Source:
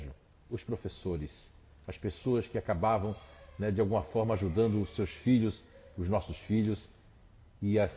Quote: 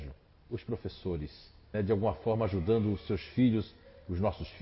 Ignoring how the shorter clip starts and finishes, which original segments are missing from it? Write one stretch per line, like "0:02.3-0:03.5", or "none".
0:01.7-0:03.6